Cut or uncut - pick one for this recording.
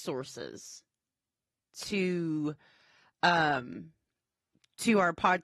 uncut